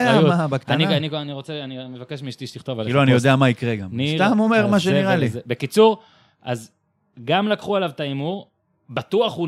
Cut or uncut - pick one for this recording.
uncut